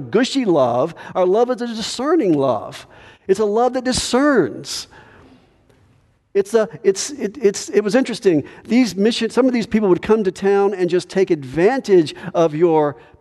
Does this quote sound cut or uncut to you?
uncut